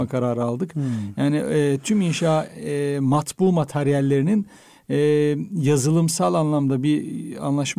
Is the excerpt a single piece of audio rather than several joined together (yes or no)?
yes